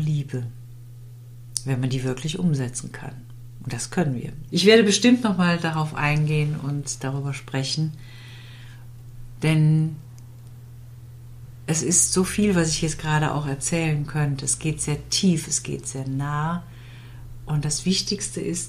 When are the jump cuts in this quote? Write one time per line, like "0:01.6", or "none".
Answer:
0:04.5